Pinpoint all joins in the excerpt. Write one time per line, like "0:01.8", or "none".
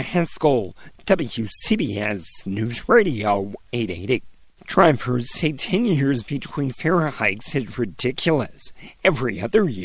0:04.6